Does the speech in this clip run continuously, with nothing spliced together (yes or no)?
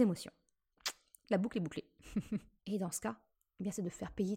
no